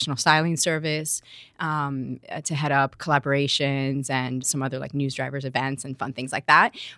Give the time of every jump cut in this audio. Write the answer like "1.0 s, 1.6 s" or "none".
4.4 s